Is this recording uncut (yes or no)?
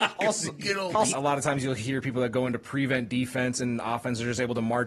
no